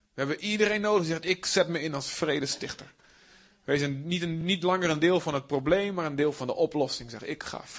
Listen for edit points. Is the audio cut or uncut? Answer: uncut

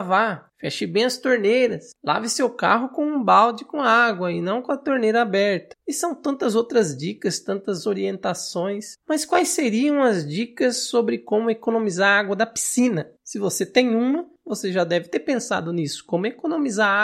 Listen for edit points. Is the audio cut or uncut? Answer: uncut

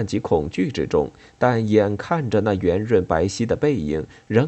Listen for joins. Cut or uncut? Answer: uncut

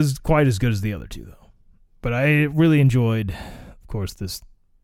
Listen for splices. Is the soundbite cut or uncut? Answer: uncut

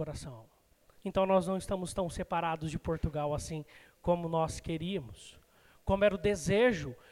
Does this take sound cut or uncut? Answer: uncut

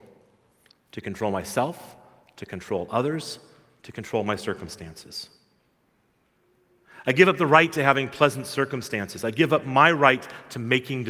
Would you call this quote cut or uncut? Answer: uncut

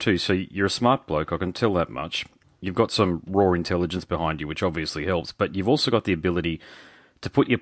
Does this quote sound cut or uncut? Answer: uncut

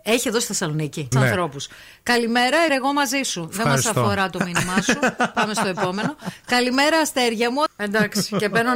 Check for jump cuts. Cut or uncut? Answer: cut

